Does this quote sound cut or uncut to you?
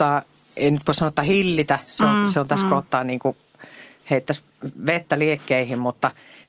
uncut